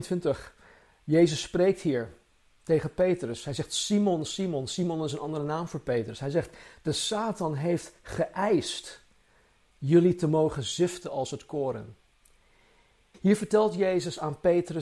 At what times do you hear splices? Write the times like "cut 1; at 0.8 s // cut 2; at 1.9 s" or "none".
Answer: cut 1; at 13.1 s